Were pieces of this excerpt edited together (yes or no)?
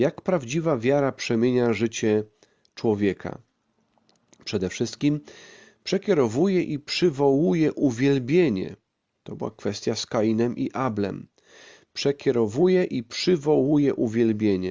no